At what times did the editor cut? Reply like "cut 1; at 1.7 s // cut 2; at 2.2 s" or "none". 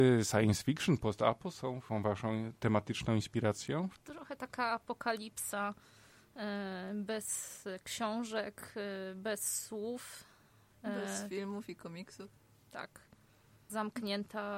none